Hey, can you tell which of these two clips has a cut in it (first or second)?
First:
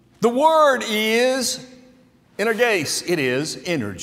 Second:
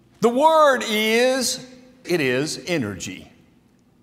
second